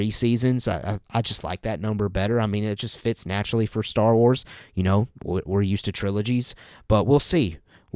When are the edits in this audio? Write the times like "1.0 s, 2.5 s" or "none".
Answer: 5.1 s